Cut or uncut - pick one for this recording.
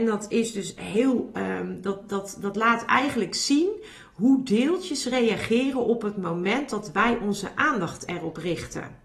uncut